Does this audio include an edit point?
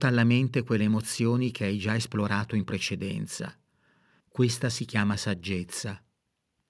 yes; 1 cut; at 4.2 s

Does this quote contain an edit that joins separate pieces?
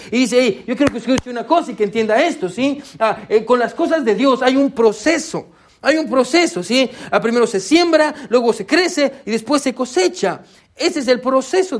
no; 0 cuts

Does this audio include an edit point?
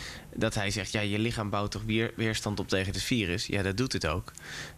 no; 0 cuts

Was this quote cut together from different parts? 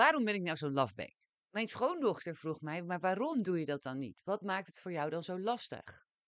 yes; 1 cut; at 1.4 s

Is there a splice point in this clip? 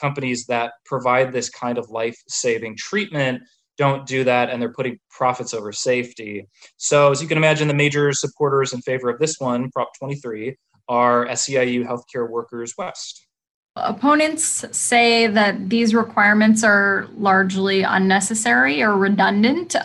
no; 0 cuts

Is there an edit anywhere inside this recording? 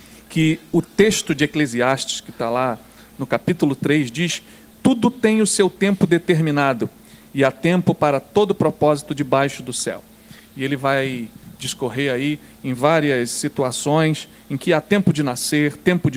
no; 0 cuts

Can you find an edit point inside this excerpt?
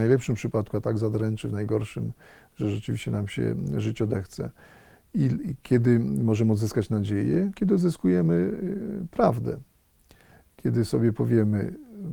no; 0 cuts

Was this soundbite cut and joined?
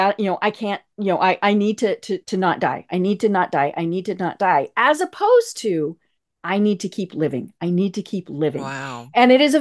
yes; 1 cut; at 2.2 s

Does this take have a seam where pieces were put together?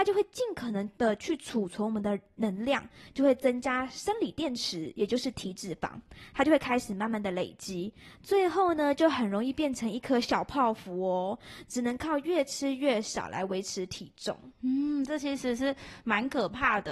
no; 0 cuts

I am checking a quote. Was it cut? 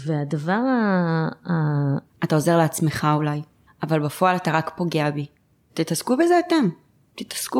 yes; 3 cuts; at 2.1 s, 3.7 s, 5.7 s

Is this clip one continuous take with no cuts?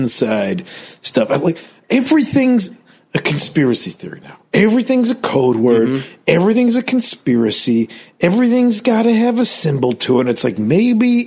yes; 0 cuts

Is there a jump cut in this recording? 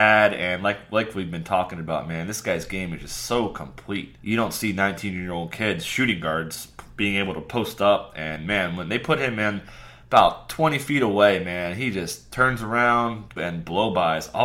yes; 2 cuts; at 4.2 s, 13.4 s

